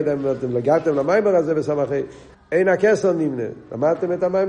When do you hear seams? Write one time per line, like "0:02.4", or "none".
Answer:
0:02.3